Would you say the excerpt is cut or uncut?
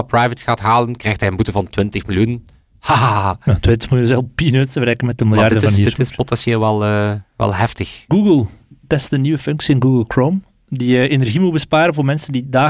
cut